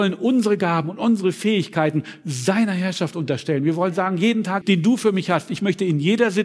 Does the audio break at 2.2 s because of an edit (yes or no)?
no